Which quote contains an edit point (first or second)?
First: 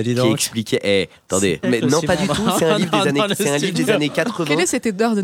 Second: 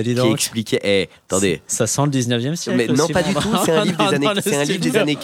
first